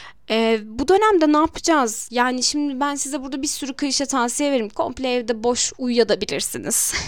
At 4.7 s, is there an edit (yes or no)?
yes